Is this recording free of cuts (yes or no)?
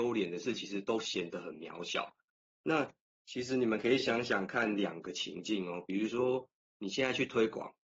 yes